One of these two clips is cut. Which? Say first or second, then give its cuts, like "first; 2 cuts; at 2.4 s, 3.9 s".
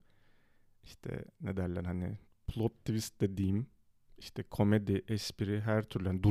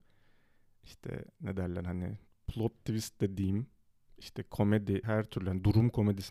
second; 1 cut; at 5.0 s